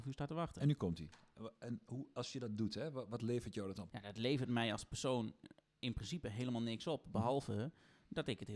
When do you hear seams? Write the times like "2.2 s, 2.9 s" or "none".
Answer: 3.9 s